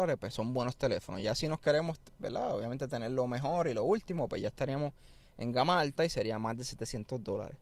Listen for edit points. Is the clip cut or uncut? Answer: uncut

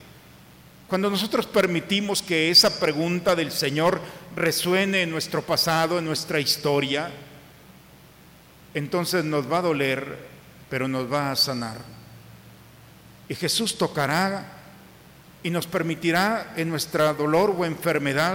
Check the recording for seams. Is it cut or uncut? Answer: uncut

